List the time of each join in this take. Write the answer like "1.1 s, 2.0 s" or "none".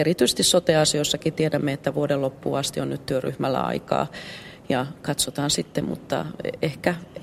5.8 s